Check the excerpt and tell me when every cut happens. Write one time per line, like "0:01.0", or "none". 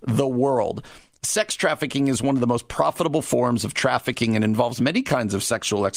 none